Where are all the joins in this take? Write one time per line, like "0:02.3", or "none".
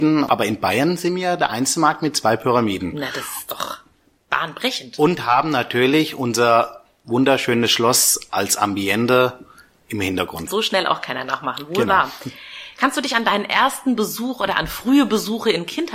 0:10.5